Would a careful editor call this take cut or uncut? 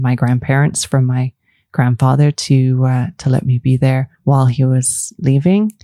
cut